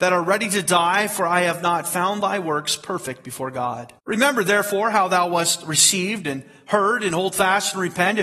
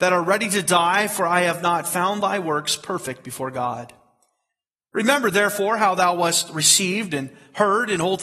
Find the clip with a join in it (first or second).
first